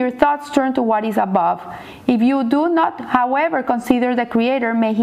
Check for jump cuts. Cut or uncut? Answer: uncut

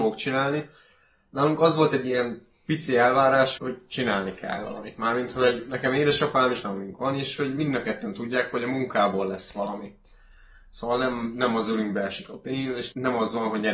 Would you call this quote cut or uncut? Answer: cut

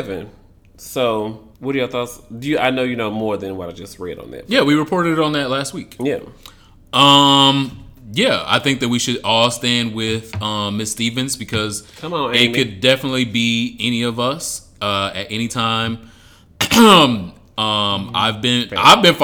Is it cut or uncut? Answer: cut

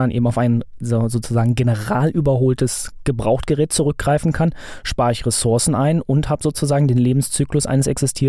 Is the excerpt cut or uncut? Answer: uncut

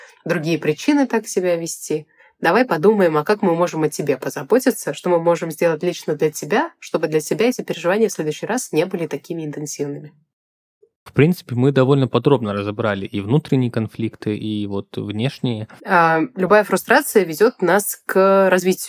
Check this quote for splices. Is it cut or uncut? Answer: cut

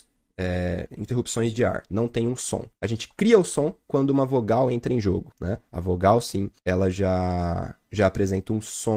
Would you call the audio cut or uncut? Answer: uncut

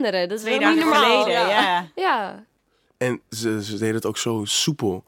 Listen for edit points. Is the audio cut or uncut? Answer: uncut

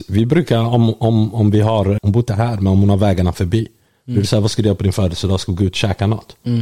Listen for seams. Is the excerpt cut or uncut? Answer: cut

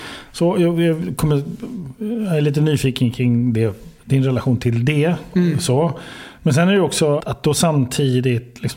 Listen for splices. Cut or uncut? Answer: cut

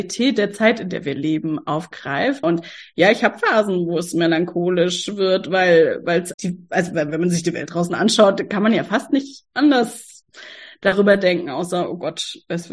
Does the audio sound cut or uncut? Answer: cut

